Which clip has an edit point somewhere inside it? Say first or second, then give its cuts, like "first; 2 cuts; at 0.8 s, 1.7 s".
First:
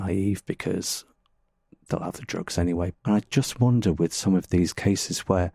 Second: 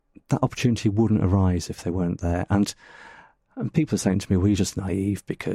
first; 1 cut; at 2.9 s